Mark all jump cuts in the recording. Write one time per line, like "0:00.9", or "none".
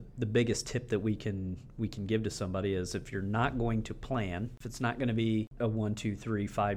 0:05.6